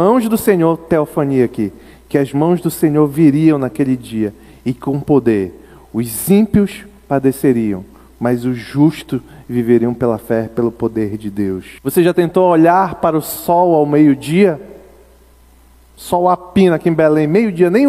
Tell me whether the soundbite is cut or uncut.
cut